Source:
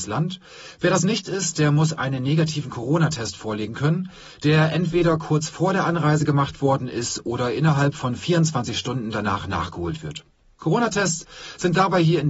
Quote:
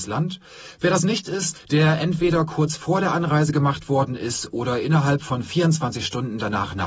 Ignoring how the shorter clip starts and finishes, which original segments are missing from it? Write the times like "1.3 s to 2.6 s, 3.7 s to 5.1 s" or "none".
1.5 s to 4.3 s